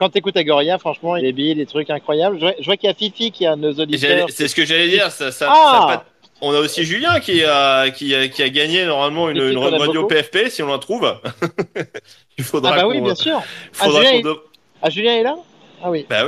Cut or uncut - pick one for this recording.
cut